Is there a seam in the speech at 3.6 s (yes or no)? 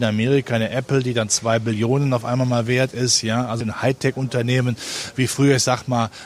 yes